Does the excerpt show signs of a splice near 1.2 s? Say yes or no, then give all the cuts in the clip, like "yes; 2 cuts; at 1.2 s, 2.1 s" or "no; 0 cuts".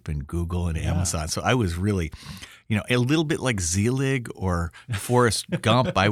no; 0 cuts